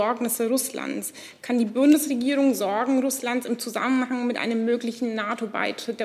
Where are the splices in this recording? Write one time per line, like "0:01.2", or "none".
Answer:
none